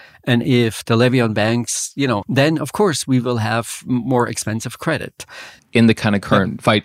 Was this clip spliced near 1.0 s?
no; 2 cuts; at 2.2 s, 5.6 s

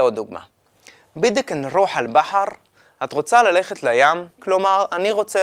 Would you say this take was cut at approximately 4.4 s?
yes; 1 cut; at 4.4 s

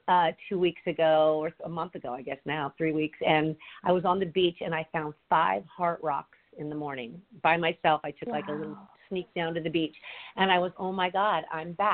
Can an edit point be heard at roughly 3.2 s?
no; 1 cut; at 10.7 s

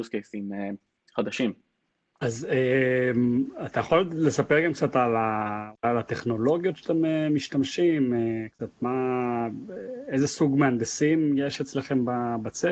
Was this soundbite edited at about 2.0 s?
no; 0 cuts

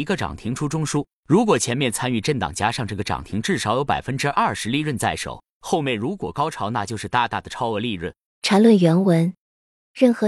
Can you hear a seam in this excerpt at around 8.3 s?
yes; 1 cut; at 8.3 s

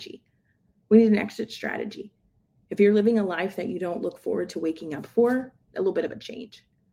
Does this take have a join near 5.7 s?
yes; 1 cut; at 5.7 s

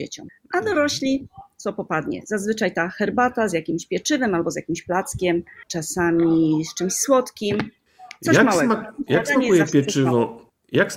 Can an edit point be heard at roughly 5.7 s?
yes; 1 cut; at 5.7 s

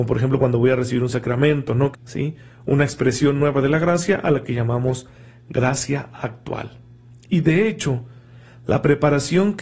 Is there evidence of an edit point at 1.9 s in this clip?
yes; 1 cut; at 1.9 s

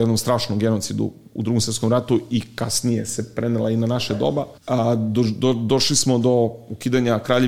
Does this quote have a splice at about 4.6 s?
yes; 1 cut; at 4.6 s

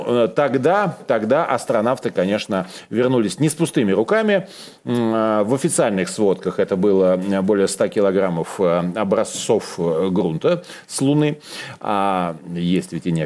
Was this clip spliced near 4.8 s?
no; 0 cuts

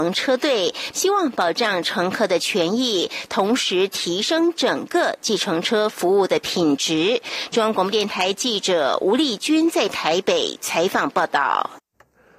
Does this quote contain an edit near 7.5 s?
no; 1 cut; at 0.9 s

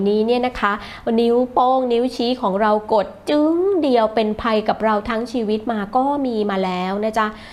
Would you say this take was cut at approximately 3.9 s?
no; 0 cuts

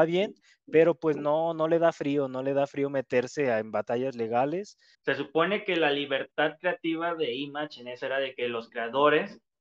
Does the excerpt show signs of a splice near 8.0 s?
yes; 2 cuts; at 4.9 s, 8.0 s

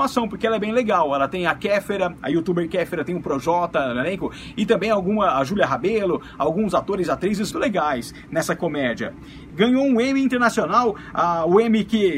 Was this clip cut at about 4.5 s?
no; 2 cuts; at 7.5 s, 9.5 s

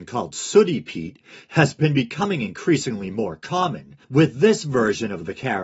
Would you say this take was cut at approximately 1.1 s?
no; 1 cut; at 4.0 s

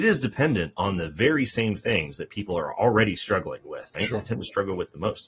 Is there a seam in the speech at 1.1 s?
no; 1 cut; at 3.9 s

